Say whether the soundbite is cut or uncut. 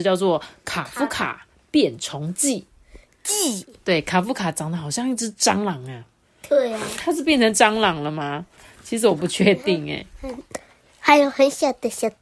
uncut